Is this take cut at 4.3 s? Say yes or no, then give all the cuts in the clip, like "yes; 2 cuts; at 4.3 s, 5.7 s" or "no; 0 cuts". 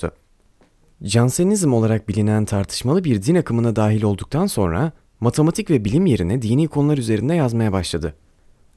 no; 1 cut; at 0.9 s